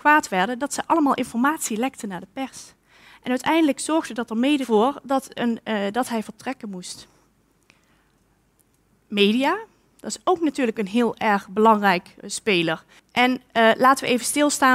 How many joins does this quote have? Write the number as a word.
one